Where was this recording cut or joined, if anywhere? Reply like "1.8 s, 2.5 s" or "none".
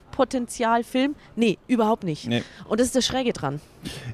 none